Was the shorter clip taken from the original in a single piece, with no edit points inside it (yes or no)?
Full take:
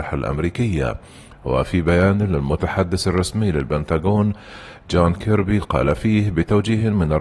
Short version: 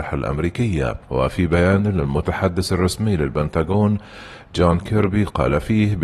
no